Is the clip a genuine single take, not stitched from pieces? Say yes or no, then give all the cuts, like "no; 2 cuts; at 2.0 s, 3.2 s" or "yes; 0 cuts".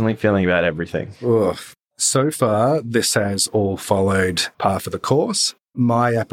no; 1 cut; at 4.5 s